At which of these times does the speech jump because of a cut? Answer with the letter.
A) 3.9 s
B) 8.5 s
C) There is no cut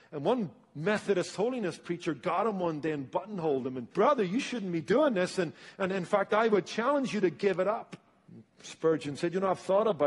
A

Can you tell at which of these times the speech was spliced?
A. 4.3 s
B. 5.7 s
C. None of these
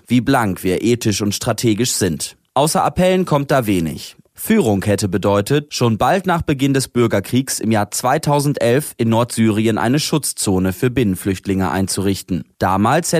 A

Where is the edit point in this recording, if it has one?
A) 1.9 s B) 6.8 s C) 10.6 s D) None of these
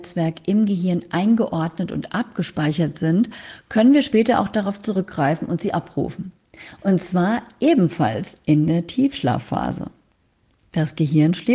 B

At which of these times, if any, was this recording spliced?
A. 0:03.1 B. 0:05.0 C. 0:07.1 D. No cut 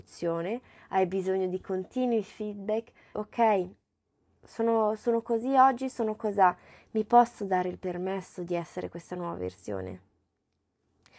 A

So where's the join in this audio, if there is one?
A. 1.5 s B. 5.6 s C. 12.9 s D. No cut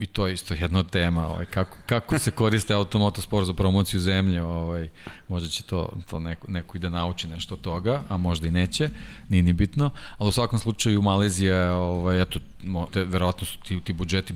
C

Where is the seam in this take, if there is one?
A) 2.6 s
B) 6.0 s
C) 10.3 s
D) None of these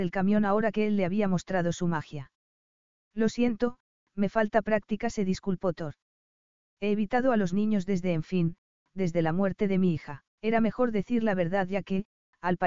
C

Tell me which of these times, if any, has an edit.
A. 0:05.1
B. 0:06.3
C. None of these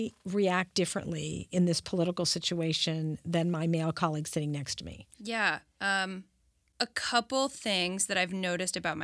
C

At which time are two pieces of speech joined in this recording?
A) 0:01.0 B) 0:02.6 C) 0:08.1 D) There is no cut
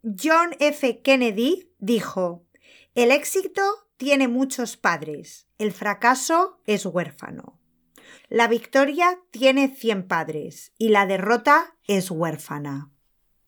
C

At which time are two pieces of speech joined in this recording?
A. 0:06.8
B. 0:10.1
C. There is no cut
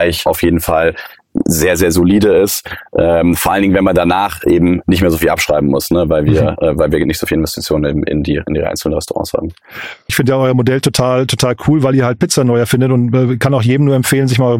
B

